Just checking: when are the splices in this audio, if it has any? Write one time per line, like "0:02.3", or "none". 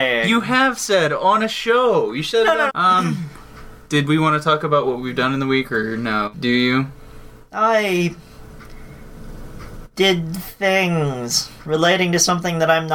0:02.7
0:06.3